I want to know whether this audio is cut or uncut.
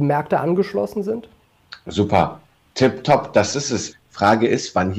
cut